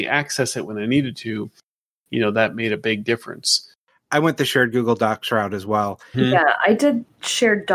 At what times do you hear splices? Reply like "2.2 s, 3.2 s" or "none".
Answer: 6.1 s